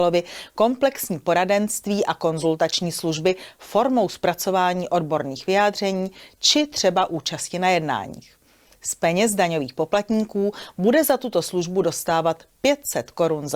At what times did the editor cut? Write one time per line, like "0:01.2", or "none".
none